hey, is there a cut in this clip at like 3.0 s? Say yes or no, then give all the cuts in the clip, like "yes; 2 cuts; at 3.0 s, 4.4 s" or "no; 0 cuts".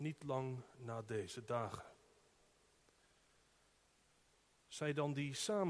no; 0 cuts